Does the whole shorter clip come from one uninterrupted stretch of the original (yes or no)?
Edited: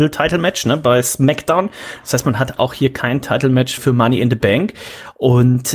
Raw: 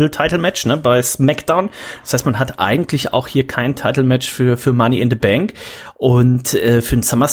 no